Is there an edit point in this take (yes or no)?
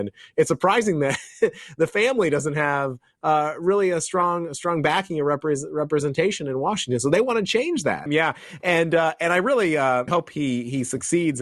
yes